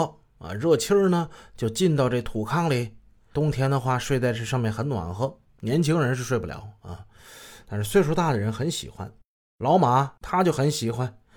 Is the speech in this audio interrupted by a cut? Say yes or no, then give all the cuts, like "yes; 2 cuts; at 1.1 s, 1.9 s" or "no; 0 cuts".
no; 0 cuts